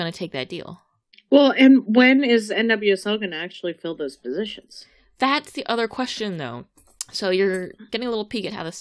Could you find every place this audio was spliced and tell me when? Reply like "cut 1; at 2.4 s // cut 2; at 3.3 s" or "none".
none